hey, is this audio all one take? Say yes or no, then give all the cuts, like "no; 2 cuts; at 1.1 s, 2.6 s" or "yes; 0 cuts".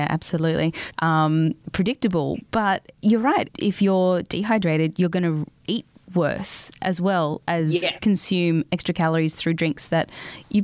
no; 2 cuts; at 0.9 s, 3.5 s